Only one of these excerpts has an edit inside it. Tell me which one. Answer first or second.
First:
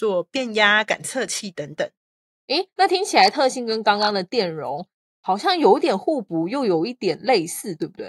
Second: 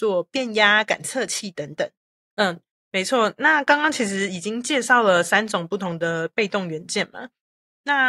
second